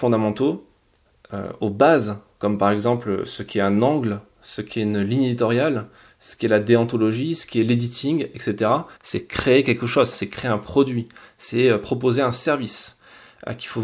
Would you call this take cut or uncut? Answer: cut